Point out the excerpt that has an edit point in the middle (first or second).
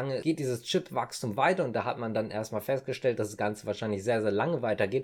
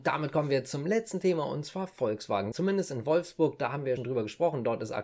second